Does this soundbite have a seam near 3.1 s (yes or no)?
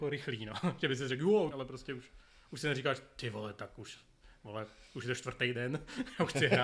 no